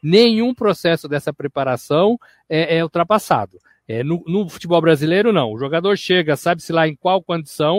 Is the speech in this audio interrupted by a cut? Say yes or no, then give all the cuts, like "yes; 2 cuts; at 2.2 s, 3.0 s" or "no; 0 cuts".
no; 0 cuts